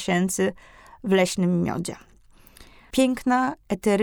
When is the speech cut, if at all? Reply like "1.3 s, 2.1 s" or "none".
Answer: 2.9 s